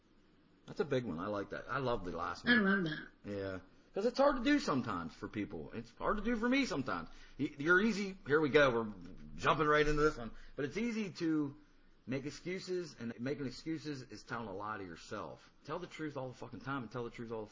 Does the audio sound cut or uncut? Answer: cut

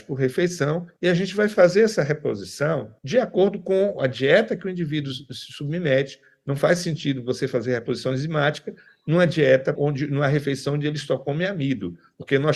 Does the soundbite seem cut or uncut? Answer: cut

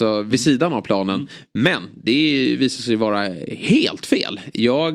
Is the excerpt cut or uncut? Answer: uncut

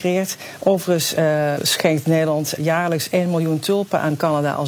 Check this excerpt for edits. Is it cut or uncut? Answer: cut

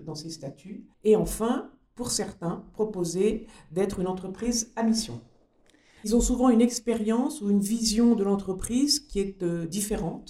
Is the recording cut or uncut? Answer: cut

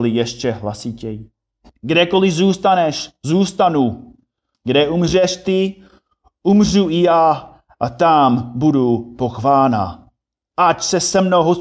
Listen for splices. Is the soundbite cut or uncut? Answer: cut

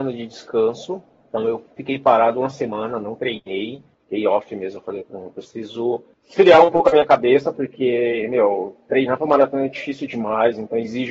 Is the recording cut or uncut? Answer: uncut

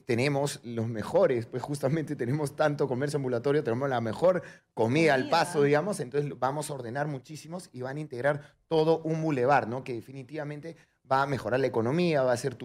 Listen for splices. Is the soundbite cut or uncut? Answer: uncut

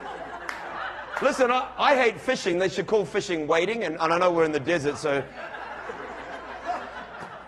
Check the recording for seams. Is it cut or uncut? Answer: uncut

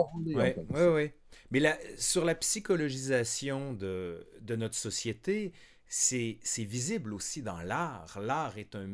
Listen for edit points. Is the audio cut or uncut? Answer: uncut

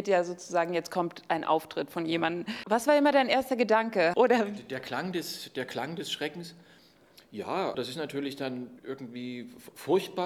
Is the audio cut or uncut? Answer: cut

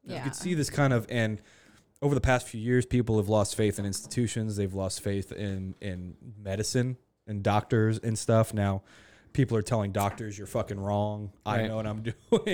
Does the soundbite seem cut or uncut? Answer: uncut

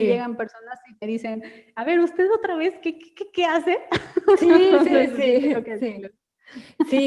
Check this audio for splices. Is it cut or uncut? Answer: uncut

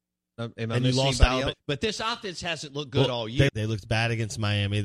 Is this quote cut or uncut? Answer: cut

